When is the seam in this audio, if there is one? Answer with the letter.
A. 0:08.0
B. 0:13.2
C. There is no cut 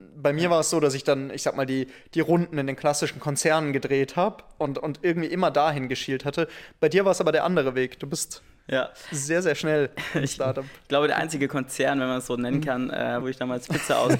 B